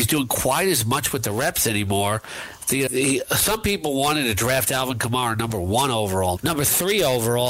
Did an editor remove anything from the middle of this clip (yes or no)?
yes